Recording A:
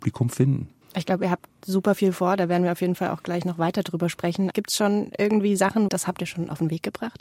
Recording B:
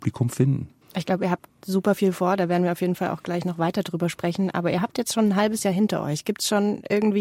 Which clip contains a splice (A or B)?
A